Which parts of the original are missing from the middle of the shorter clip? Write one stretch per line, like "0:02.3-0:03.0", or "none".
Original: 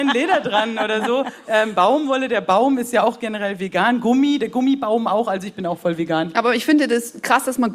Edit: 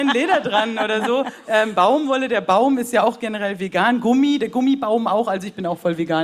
none